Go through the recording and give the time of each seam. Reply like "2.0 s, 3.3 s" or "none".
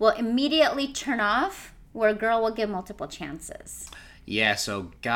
none